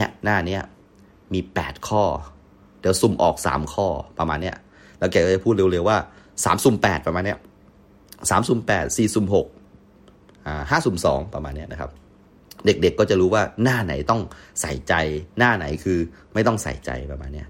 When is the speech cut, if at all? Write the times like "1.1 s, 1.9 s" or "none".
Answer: 15.3 s

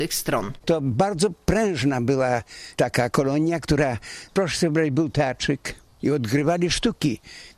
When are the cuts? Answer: none

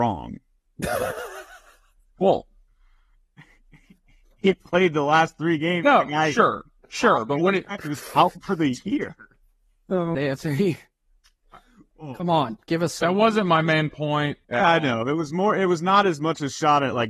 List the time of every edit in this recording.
10.1 s, 14.4 s

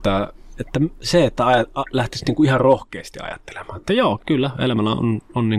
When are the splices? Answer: 4.2 s

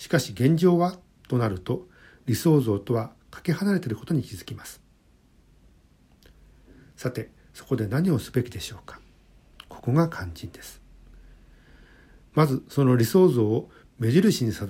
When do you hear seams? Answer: none

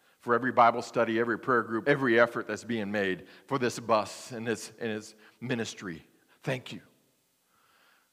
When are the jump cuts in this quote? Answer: 1.8 s

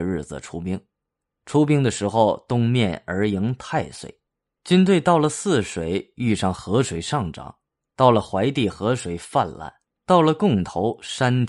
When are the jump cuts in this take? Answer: none

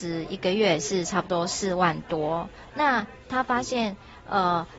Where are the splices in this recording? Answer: 2.7 s

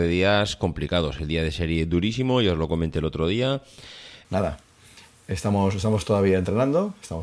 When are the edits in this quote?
4.2 s

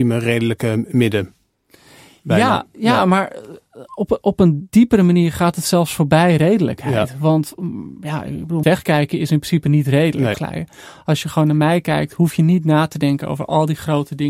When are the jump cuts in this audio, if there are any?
8.6 s, 10.3 s

